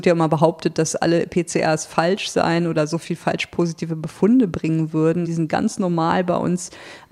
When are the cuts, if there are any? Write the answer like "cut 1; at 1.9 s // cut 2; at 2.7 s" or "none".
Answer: cut 1; at 5.2 s